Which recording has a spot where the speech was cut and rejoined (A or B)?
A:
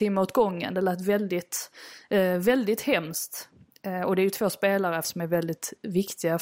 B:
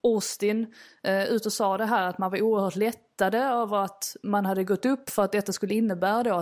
A